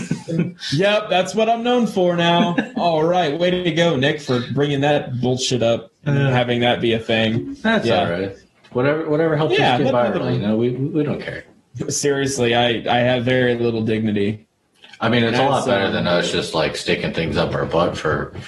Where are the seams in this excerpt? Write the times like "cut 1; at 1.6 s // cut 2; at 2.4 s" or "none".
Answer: none